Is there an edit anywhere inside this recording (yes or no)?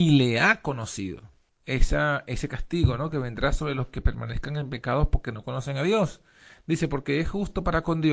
yes